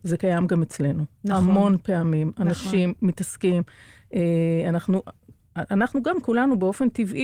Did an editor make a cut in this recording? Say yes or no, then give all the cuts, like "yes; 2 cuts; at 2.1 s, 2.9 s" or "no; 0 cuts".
no; 0 cuts